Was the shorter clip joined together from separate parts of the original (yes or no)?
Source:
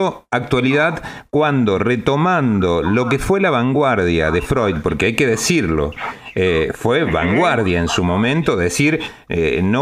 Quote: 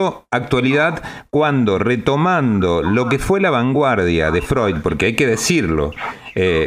no